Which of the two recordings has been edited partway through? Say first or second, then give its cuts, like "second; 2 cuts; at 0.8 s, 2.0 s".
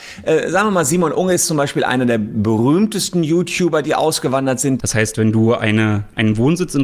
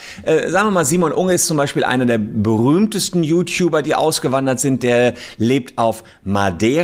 first; 1 cut; at 4.8 s